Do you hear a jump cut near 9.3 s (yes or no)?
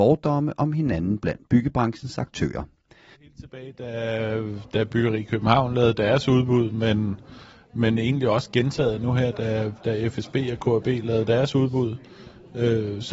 no